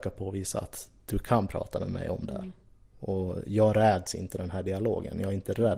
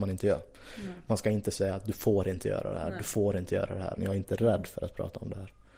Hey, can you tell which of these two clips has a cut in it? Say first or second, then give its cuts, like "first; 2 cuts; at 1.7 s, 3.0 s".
second; 1 cut; at 4.0 s